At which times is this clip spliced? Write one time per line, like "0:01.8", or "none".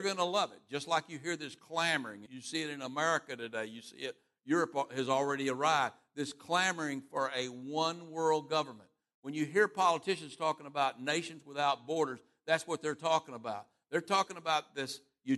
0:02.3